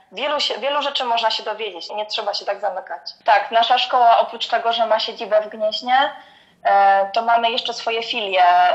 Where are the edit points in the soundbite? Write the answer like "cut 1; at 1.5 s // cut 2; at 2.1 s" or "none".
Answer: cut 1; at 1.9 s // cut 2; at 3.2 s